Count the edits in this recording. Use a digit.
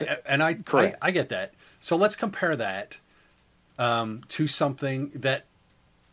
0